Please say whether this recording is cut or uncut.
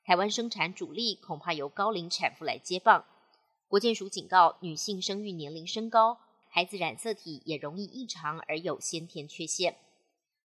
cut